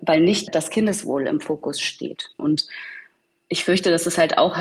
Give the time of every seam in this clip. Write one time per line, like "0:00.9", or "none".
0:02.4